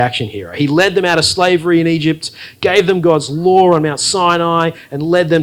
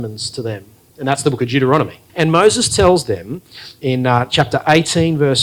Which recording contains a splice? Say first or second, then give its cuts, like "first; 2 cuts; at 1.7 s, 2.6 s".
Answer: second; 1 cut; at 2.1 s